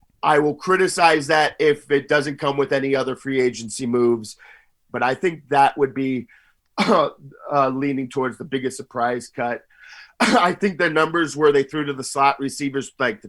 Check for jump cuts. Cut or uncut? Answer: cut